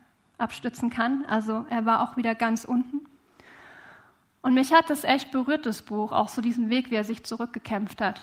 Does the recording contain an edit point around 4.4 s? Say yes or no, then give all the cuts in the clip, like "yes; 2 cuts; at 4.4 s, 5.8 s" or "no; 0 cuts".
no; 0 cuts